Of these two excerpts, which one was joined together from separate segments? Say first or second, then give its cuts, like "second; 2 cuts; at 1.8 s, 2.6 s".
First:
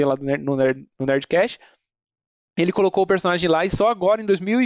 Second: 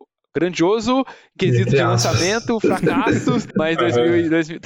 second; 1 cut; at 3.5 s